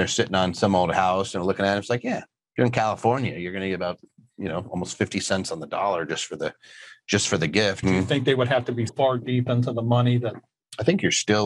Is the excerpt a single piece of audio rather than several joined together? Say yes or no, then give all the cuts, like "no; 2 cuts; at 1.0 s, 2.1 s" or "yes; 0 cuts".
no; 2 cuts; at 7.8 s, 8.9 s